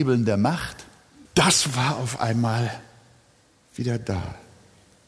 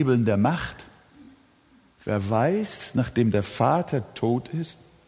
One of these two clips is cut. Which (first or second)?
first